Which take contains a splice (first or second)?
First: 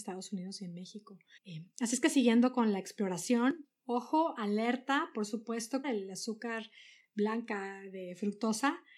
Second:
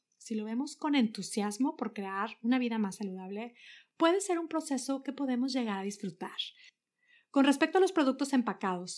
first